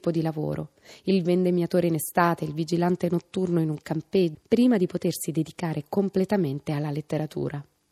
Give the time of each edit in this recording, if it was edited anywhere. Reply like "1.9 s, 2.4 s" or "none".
4.3 s

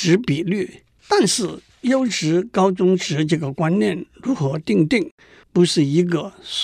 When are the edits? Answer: 1.0 s, 5.4 s

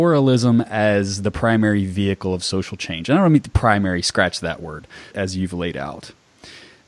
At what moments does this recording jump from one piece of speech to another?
5.1 s

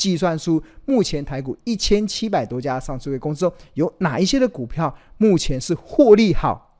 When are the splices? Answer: none

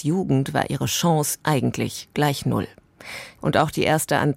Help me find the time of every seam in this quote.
1.4 s, 3.4 s

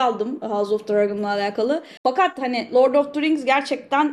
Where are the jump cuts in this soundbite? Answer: 2.0 s

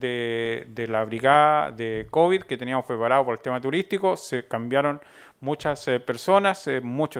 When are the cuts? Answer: none

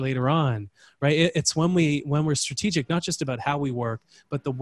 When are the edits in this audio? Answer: none

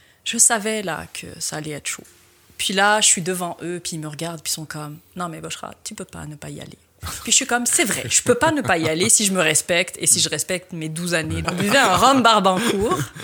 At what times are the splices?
11.4 s

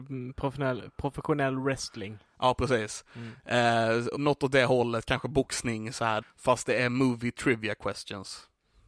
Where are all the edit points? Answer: 4.2 s, 6.2 s

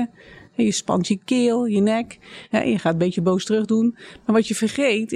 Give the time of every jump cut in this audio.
2.5 s

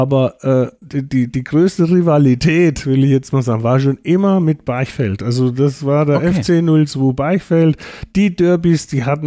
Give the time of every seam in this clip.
none

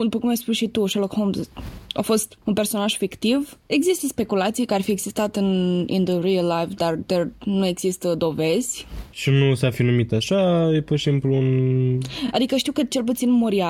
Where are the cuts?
none

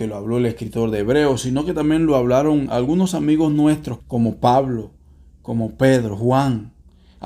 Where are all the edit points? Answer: 4.0 s

